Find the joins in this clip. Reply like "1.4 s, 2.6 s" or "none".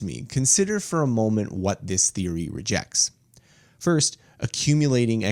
none